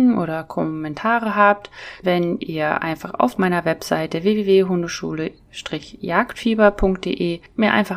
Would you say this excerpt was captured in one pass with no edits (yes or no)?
no